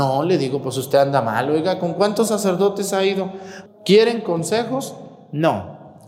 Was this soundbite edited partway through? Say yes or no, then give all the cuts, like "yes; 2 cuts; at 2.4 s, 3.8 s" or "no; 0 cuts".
yes; 1 cut; at 3.7 s